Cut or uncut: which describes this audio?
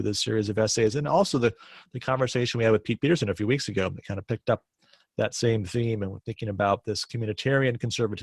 uncut